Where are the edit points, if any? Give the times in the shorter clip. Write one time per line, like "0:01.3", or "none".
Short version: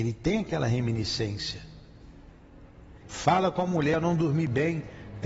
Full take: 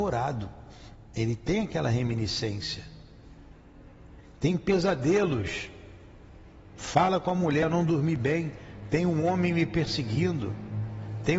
0:03.0